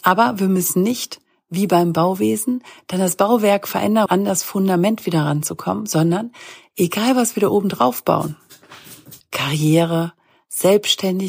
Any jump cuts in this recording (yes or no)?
yes